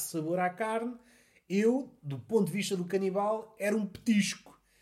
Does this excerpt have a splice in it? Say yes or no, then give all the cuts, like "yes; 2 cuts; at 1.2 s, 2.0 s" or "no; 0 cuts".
no; 0 cuts